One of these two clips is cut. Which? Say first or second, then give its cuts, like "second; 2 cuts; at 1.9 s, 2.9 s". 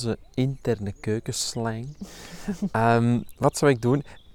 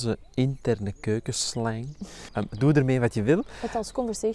second; 1 cut; at 2.3 s